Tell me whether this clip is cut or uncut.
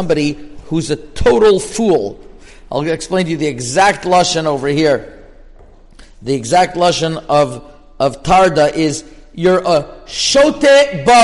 uncut